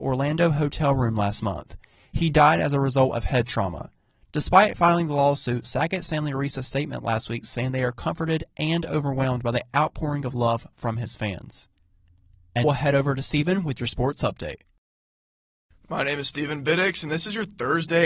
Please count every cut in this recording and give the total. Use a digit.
1